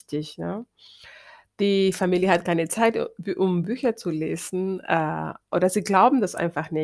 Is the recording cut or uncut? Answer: uncut